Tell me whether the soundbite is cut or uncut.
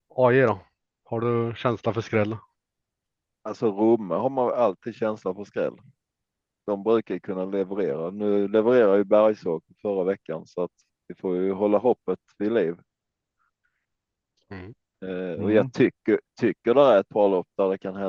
uncut